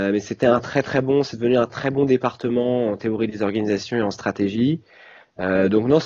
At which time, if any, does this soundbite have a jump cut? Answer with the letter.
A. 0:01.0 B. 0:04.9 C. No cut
C